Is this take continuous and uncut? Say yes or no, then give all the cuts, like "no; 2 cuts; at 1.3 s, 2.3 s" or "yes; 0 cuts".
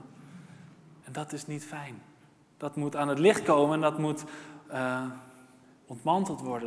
no; 1 cut; at 1.0 s